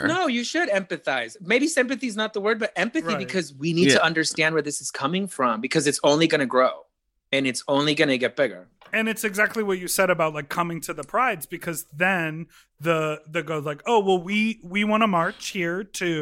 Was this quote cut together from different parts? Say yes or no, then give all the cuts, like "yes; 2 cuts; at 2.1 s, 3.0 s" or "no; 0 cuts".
no; 0 cuts